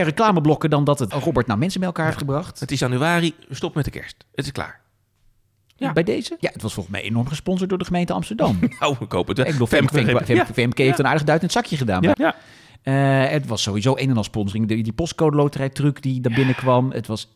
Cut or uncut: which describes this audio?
cut